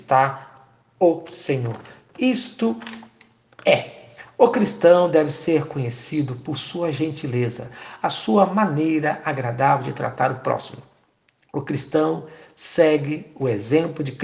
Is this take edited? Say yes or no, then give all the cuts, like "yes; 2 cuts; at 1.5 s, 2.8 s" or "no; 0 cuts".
no; 0 cuts